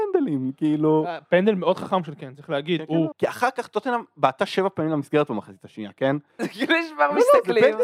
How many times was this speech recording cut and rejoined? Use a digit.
2